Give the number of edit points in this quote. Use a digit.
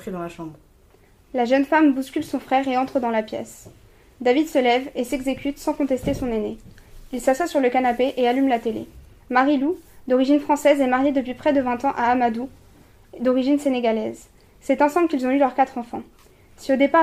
1